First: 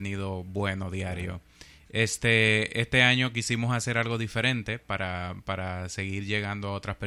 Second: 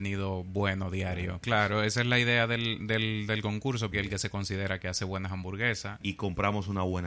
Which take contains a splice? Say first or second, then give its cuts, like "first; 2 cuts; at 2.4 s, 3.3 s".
second; 3 cuts; at 1.4 s, 3.9 s, 6.0 s